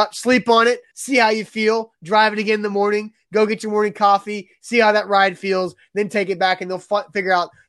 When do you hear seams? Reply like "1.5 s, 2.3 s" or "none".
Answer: 0.9 s